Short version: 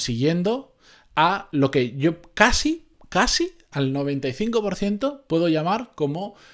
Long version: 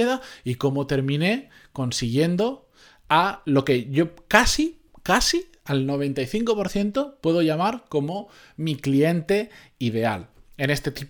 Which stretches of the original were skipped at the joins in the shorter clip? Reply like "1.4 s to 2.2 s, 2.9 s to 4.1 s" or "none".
none